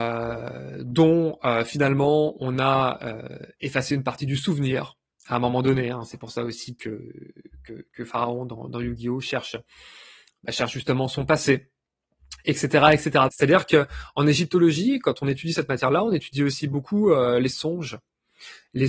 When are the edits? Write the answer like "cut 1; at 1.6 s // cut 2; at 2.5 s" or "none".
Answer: cut 1; at 13.3 s